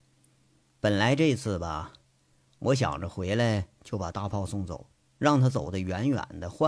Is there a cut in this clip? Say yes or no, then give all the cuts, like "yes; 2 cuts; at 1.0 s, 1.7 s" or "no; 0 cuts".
no; 0 cuts